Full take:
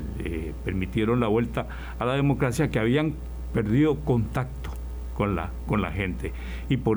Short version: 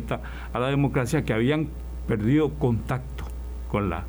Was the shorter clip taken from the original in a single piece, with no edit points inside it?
yes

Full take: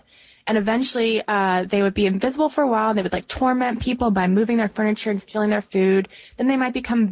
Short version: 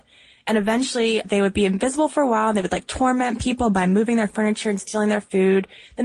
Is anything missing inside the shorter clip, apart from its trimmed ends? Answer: yes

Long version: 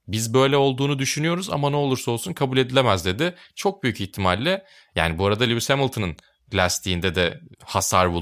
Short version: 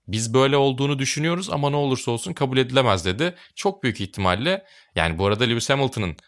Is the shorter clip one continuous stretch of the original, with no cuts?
yes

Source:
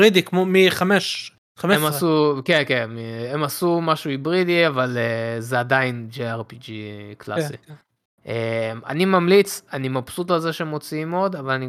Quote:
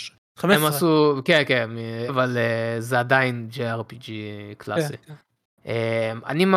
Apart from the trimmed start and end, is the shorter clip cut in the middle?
yes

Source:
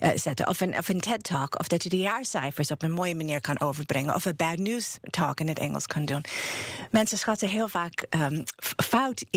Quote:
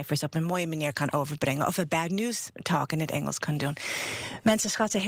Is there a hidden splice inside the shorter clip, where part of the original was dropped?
no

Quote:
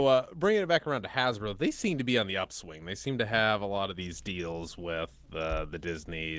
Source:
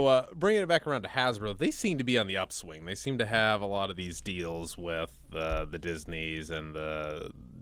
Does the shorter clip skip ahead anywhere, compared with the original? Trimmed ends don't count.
no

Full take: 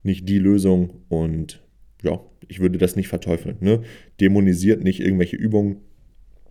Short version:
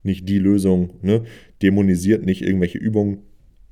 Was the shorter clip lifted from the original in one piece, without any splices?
no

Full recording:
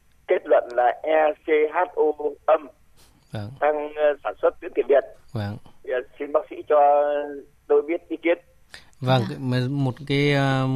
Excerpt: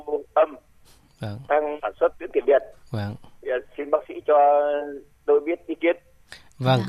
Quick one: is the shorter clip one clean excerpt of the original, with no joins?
no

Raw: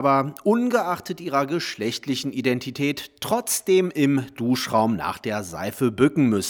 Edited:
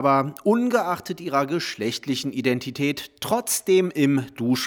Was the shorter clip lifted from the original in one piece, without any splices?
yes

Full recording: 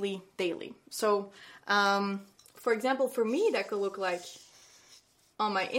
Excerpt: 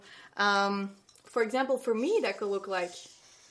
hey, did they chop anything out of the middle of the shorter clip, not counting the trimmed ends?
no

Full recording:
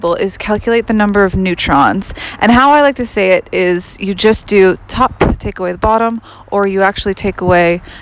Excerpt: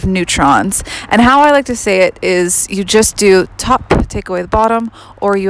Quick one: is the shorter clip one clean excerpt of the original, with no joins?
yes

